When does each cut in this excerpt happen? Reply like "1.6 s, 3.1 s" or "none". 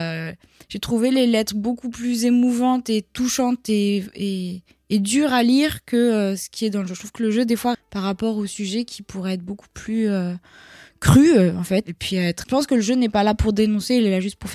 7.7 s, 12.4 s